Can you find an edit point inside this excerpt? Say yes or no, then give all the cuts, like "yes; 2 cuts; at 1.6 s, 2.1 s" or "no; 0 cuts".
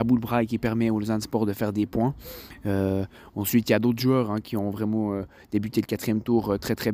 no; 0 cuts